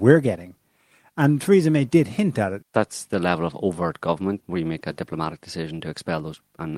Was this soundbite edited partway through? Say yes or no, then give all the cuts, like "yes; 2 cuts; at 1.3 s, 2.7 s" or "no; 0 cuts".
yes; 2 cuts; at 2.6 s, 4.4 s